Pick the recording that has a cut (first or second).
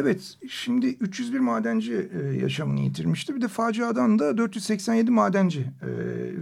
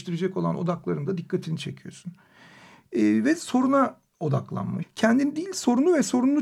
second